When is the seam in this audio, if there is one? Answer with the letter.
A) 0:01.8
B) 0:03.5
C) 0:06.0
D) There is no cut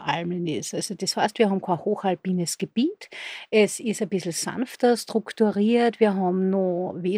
D